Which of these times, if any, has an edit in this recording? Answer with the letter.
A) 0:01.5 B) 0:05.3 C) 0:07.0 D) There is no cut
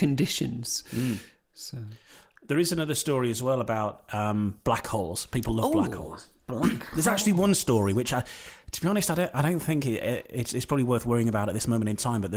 D